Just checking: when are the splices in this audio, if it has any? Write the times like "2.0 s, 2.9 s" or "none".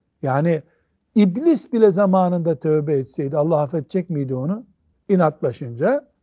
4.9 s